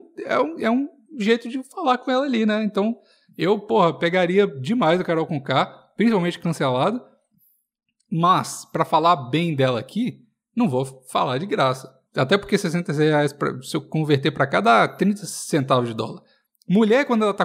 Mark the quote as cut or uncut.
cut